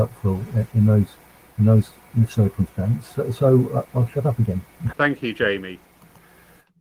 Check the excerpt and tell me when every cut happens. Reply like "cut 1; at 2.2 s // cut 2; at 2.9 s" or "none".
cut 1; at 3.9 s // cut 2; at 4.9 s